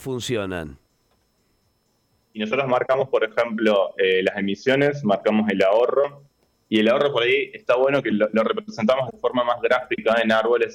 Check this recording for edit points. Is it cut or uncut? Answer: uncut